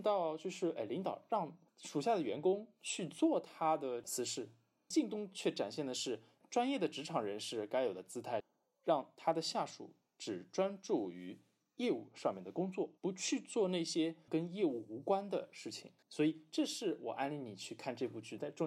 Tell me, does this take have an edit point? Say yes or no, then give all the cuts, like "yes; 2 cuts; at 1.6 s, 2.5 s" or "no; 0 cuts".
yes; 2 cuts; at 13.0 s, 16.0 s